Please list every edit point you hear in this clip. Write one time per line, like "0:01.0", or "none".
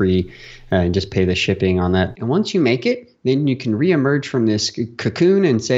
0:02.1